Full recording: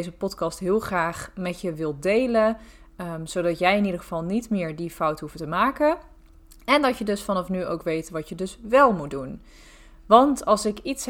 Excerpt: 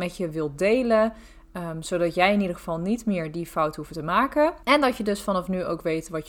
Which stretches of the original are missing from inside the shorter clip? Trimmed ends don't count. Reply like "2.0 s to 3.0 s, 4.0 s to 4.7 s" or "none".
6.1 s to 6.6 s